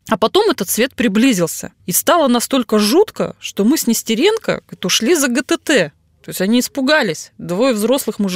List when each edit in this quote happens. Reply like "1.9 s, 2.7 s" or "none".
1.8 s